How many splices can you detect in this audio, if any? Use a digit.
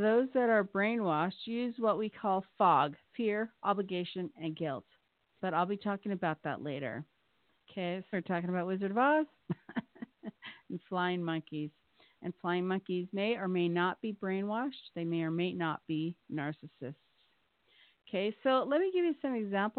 2